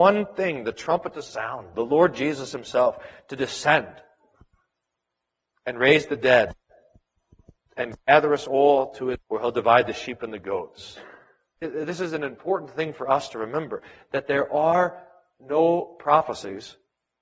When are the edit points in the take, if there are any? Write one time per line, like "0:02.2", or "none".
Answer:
0:01.7
0:09.2
0:11.6